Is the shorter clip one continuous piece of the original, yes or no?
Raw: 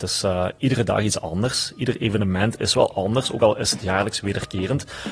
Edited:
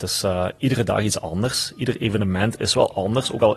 yes